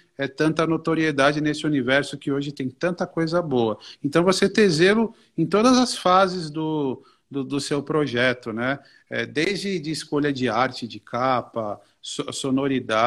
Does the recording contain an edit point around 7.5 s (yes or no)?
no